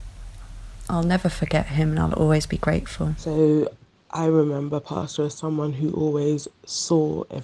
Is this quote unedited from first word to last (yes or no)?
yes